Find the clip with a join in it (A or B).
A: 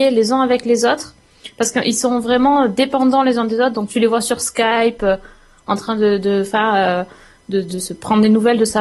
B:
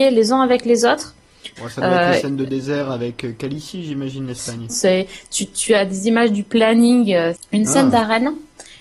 B